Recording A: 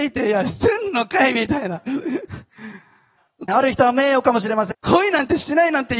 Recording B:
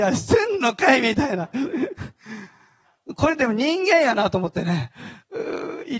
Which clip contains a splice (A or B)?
A